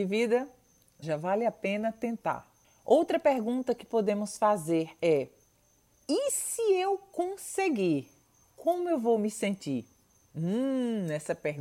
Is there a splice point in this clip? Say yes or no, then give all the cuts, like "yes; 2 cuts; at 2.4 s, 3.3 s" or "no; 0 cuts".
yes; 1 cut; at 1.0 s